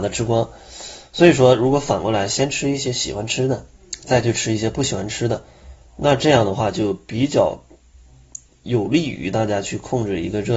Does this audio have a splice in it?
no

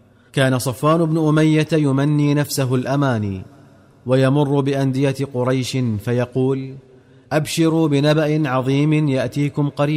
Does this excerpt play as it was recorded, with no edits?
yes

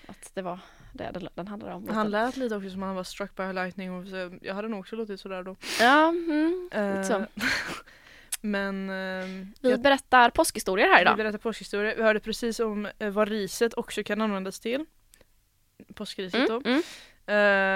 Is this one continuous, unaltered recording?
yes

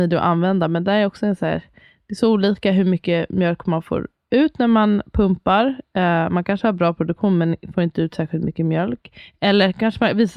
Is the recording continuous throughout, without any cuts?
yes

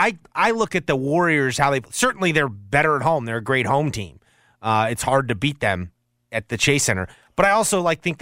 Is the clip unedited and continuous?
yes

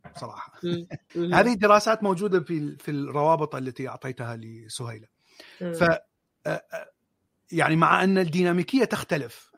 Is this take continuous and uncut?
no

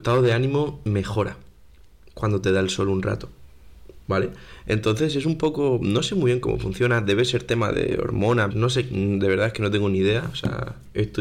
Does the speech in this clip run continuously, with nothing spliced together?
no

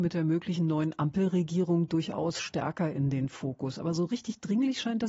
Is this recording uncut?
yes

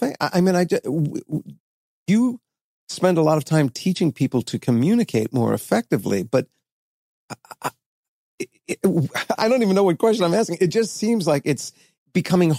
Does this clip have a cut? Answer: yes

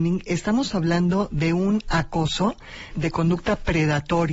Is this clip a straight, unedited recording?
no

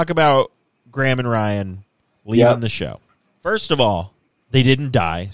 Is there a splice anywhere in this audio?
no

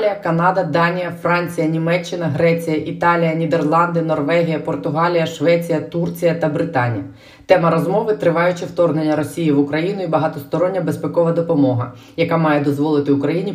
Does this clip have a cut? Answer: no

